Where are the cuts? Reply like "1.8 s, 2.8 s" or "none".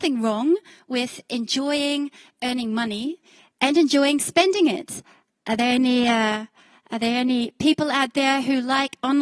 none